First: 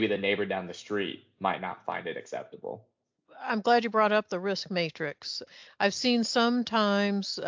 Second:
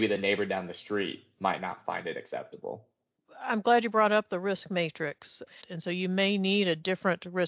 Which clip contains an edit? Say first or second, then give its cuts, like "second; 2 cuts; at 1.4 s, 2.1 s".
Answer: second; 1 cut; at 5.6 s